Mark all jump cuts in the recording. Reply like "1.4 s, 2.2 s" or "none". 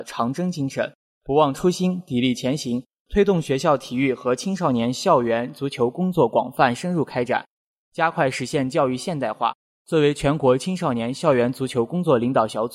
none